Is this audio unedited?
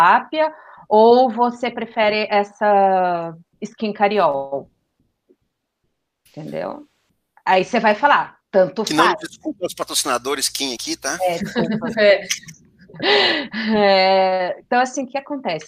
yes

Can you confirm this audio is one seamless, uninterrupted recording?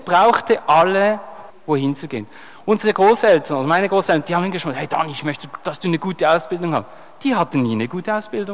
no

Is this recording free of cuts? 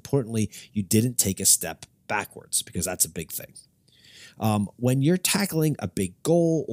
yes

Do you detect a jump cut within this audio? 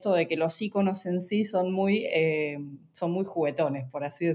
no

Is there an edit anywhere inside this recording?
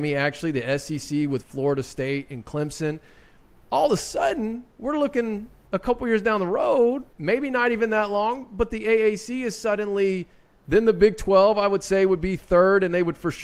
yes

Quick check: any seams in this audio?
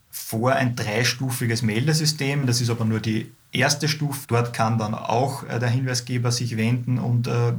yes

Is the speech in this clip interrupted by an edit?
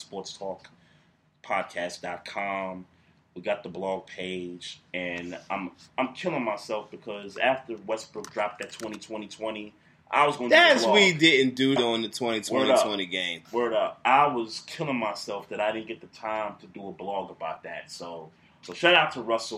yes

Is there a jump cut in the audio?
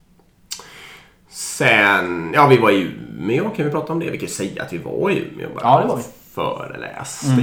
no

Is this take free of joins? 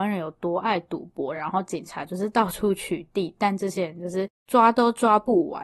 yes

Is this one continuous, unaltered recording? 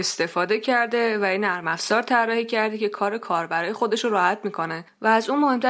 yes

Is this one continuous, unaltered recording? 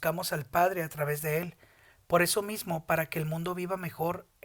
yes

